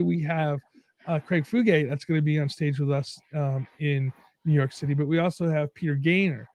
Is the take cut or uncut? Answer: uncut